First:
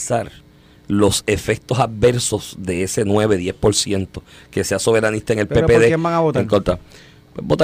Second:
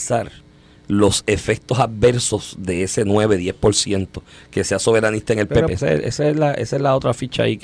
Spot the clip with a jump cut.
second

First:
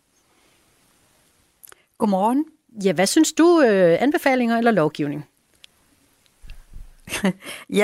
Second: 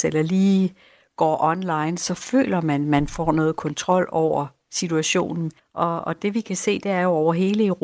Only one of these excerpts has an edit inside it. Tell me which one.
second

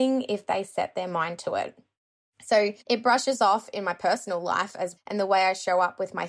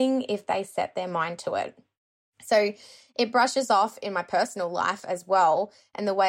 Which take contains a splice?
first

